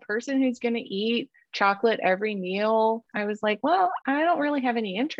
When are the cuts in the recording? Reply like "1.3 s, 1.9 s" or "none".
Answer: 3.1 s